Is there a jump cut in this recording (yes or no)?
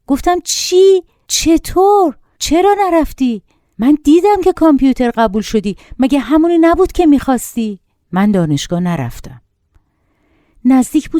yes